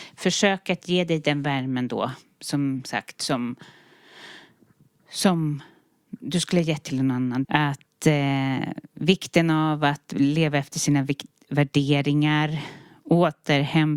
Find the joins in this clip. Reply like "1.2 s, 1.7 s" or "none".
7.4 s